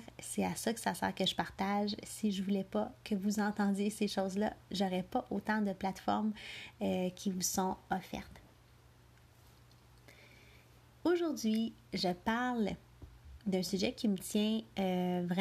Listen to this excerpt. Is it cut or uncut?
uncut